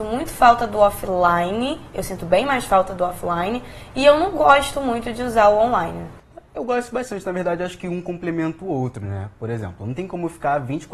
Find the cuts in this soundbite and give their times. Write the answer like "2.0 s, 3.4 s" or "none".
none